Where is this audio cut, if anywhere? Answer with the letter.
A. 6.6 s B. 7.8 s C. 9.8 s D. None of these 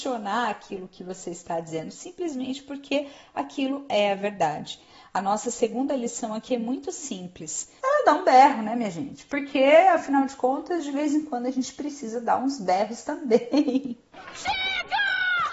B